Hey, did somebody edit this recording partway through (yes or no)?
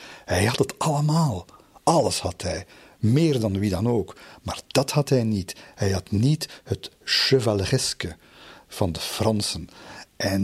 no